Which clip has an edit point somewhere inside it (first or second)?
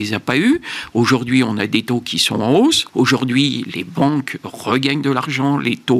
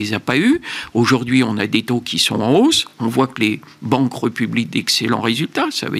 first